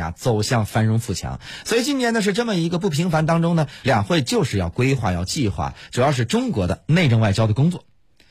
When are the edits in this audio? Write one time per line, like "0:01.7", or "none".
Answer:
0:03.8